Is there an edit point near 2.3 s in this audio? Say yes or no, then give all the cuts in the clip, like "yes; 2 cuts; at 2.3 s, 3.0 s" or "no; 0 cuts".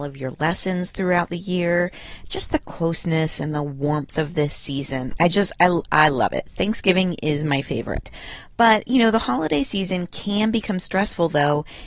no; 1 cut; at 5.2 s